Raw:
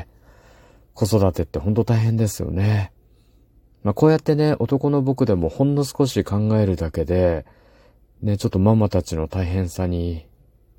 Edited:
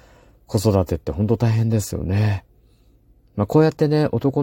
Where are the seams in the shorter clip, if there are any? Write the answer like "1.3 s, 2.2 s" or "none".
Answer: none